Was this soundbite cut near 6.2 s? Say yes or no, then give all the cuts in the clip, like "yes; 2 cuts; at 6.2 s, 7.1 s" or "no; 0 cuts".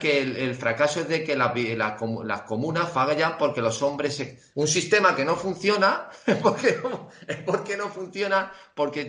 no; 1 cut; at 4.5 s